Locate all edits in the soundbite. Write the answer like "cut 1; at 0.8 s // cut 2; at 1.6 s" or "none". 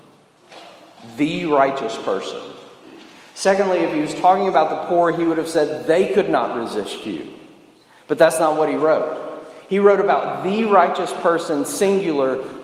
none